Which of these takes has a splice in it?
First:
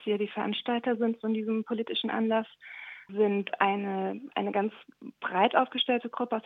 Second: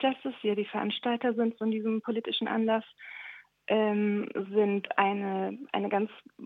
first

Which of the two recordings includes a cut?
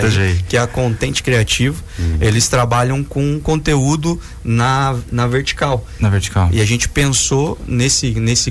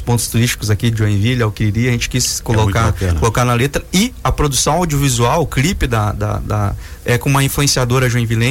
second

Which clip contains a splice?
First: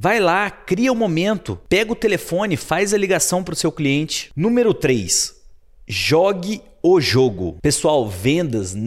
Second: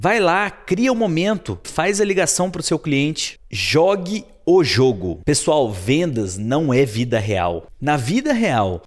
second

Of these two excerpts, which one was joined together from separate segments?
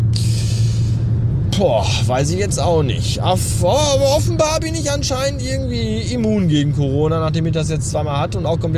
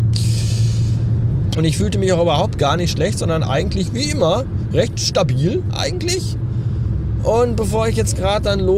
second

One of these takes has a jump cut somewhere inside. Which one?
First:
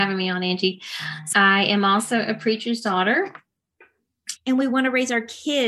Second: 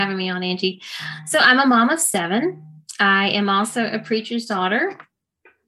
first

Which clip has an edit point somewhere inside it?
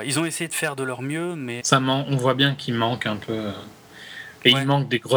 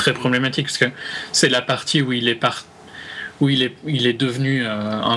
first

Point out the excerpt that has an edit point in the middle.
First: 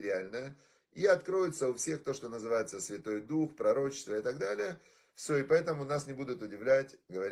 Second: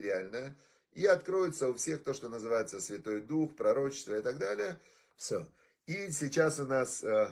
second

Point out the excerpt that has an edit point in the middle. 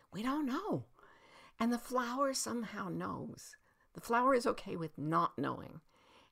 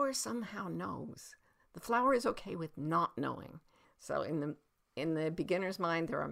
second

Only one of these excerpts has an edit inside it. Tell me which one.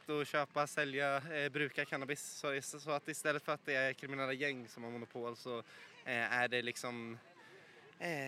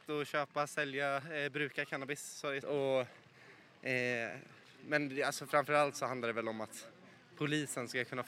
second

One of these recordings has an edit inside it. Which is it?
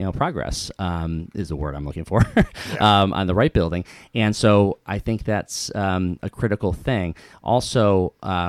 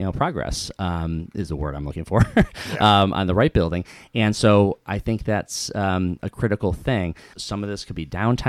second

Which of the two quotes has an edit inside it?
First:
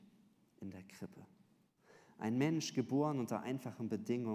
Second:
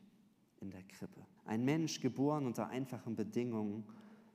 second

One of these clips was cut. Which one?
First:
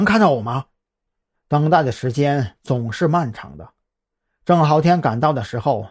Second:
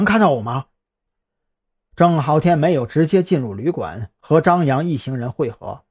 first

